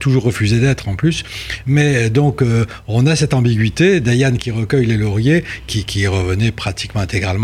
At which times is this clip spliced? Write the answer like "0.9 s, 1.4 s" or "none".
none